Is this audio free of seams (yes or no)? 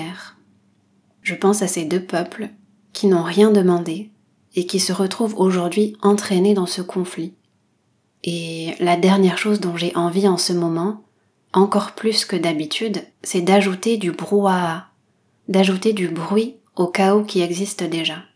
no